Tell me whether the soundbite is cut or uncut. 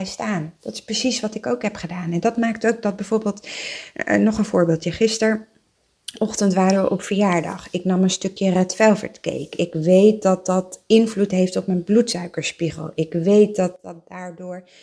uncut